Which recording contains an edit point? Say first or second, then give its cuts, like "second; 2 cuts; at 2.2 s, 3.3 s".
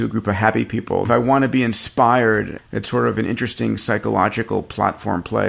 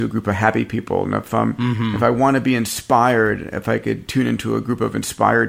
first; 2 cuts; at 1.0 s, 2.6 s